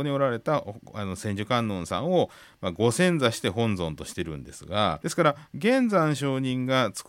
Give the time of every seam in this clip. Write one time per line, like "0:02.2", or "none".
0:05.0